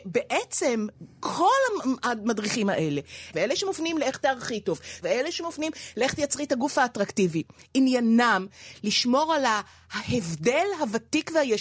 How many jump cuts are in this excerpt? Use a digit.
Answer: 2